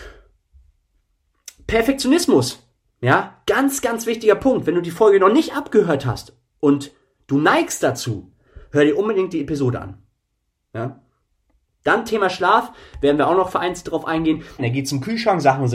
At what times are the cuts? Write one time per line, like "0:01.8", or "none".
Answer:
0:14.6